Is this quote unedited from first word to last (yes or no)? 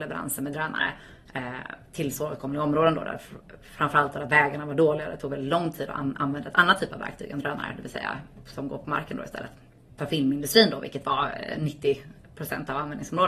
no